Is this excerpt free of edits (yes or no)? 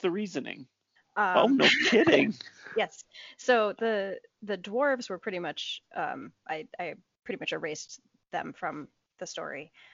no